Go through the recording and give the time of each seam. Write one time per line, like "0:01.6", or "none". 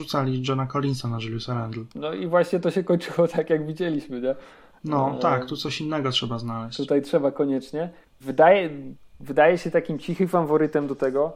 none